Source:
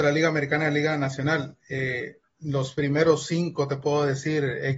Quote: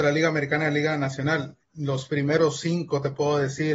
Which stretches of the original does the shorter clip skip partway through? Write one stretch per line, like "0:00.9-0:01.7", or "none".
0:01.6-0:02.3